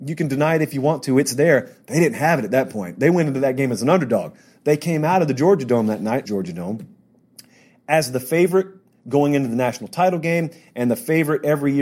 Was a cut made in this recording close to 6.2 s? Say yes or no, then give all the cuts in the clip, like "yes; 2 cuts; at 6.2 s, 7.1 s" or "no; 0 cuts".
yes; 1 cut; at 6.2 s